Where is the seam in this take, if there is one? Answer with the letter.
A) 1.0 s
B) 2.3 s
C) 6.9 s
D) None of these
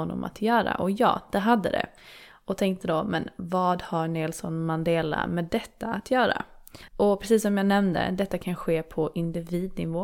C